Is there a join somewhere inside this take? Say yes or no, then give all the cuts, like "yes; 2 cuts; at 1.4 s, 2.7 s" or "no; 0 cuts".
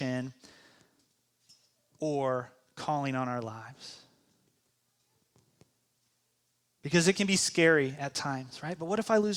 no; 0 cuts